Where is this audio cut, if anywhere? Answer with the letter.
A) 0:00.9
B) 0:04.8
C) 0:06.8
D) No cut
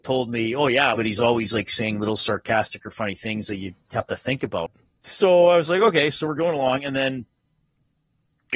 A